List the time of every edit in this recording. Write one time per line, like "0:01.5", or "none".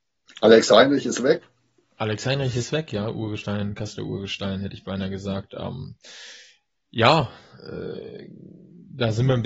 none